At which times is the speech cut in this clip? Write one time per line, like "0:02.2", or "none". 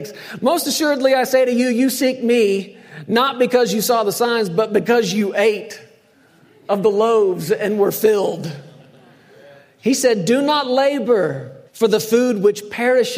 0:11.7